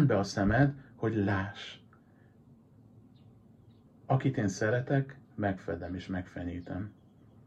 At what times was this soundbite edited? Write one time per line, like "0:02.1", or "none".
0:03.9
0:05.2

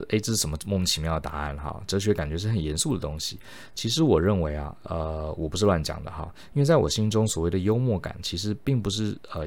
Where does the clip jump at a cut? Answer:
none

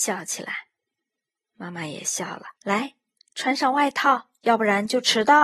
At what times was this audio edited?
0:01.1
0:02.6
0:04.4

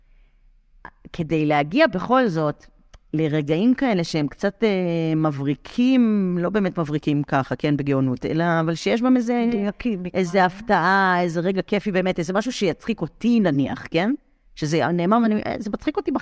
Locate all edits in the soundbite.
none

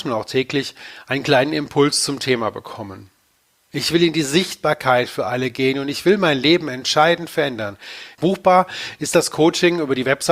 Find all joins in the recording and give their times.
0:03.7
0:08.1

